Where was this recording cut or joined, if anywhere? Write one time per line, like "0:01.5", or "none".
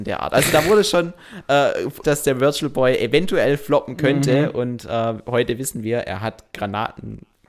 0:02.0